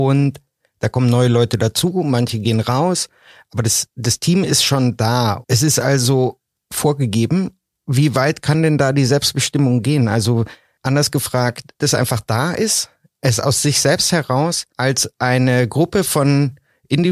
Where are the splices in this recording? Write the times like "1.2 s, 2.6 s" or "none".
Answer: 11.8 s, 14.7 s